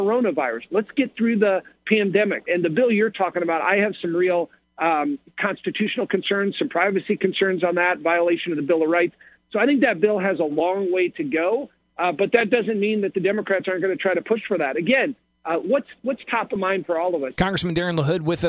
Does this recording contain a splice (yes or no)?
yes